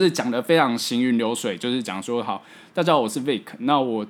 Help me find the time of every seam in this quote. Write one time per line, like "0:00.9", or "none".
none